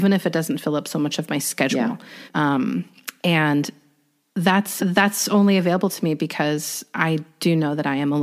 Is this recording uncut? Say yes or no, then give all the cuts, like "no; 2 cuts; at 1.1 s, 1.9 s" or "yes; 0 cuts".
no; 2 cuts; at 2.3 s, 4.8 s